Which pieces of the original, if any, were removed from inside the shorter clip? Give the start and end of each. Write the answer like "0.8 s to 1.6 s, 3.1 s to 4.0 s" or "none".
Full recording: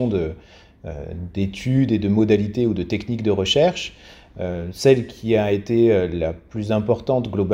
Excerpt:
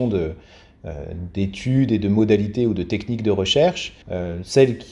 4.0 s to 4.3 s